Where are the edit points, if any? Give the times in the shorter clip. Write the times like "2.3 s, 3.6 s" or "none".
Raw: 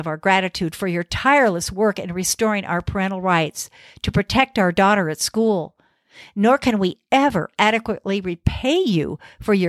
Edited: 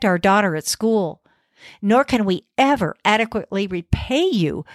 none